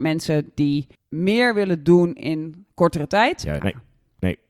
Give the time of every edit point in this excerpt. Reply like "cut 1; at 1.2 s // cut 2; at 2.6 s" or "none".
cut 1; at 3.6 s